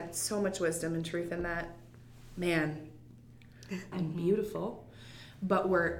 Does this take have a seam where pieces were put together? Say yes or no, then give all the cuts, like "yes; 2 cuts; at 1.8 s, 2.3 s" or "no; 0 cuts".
yes; 1 cut; at 3.9 s